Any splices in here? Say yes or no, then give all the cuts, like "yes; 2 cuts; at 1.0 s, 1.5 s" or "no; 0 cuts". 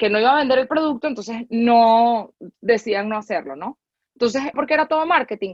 yes; 1 cut; at 4.5 s